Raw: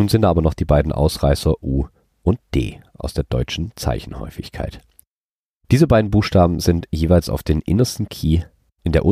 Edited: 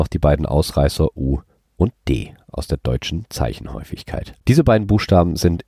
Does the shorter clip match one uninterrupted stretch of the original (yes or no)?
no